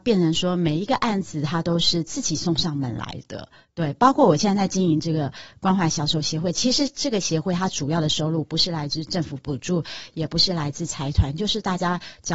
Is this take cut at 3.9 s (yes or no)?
no